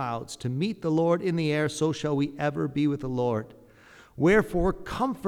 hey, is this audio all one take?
yes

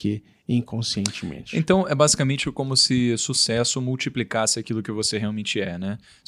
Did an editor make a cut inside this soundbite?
no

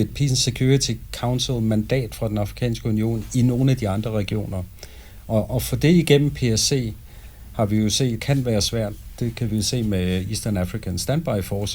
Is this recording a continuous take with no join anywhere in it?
no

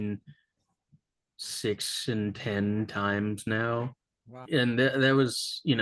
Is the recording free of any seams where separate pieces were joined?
no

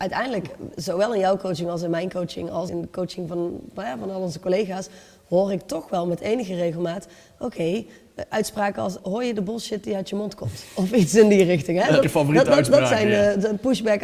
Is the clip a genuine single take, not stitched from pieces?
no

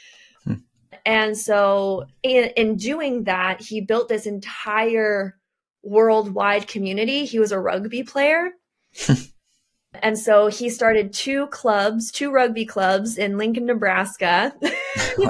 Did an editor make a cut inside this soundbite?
no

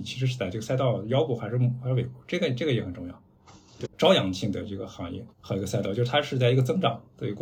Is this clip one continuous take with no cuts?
no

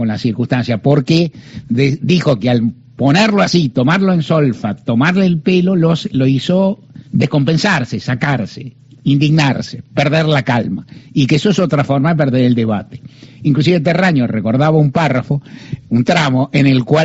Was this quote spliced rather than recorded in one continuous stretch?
yes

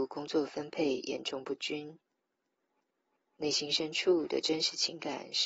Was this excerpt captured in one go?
yes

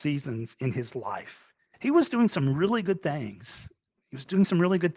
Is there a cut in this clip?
yes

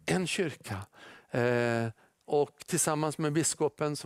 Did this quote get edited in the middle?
no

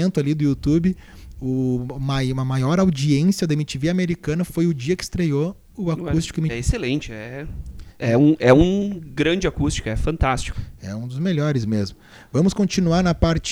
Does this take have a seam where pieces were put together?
yes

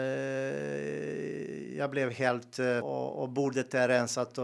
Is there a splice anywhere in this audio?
yes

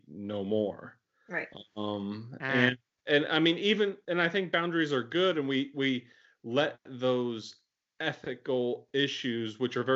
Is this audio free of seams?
yes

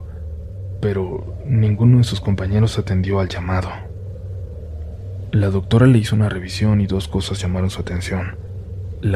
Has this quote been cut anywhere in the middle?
no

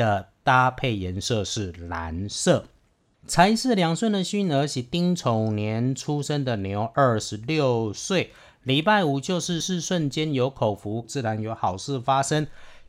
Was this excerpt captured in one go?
no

